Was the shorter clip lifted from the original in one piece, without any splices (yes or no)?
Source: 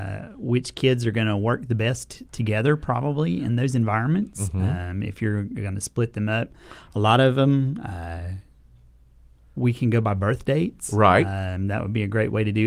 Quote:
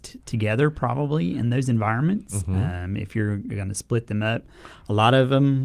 yes